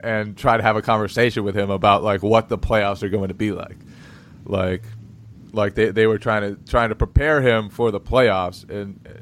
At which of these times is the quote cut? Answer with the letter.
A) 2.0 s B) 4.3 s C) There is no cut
C